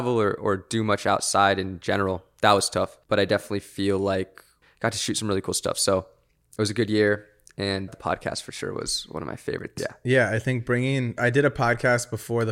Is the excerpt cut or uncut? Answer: cut